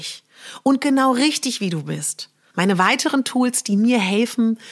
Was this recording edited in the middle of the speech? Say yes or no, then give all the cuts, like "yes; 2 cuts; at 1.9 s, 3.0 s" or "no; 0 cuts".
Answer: yes; 1 cut; at 2.5 s